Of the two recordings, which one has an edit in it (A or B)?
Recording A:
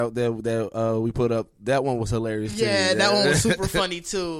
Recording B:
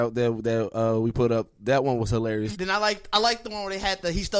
B